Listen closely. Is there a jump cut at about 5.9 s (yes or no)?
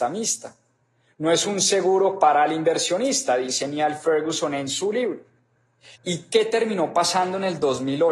yes